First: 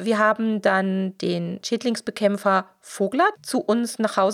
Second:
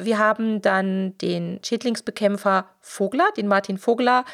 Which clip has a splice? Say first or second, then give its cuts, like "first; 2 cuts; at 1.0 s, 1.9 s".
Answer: first; 1 cut; at 3.4 s